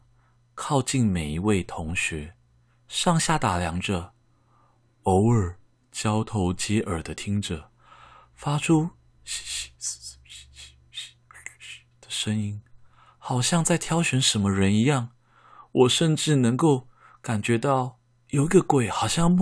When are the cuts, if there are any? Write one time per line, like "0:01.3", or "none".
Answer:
none